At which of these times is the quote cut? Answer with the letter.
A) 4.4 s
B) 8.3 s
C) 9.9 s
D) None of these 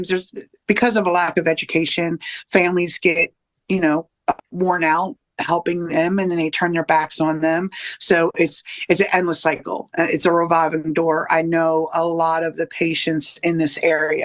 A